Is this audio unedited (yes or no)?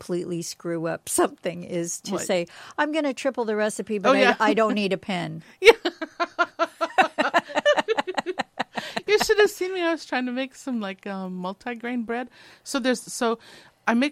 yes